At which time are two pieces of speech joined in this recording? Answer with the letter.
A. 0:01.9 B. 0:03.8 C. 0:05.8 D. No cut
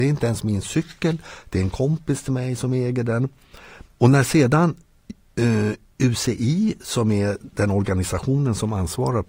B